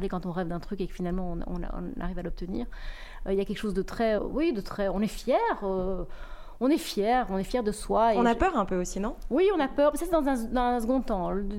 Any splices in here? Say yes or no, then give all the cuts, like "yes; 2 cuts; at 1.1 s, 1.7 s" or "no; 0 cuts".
yes; 1 cut; at 4.2 s